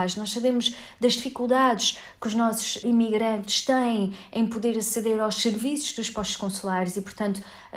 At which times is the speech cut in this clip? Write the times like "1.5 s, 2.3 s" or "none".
2.8 s